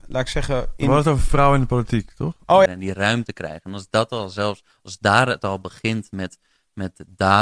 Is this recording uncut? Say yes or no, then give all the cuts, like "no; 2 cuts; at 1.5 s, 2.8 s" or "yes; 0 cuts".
no; 1 cut; at 2.7 s